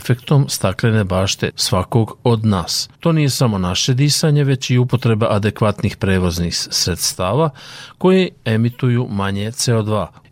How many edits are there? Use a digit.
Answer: 1